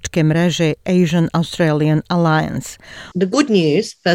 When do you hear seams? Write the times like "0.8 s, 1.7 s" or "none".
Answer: 3.1 s